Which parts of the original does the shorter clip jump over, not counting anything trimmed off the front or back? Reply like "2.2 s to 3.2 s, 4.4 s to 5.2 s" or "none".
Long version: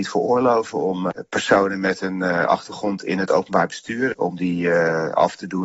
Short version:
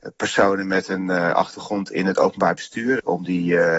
none